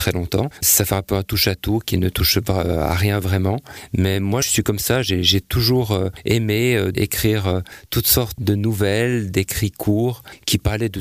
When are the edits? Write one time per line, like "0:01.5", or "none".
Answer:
0:06.9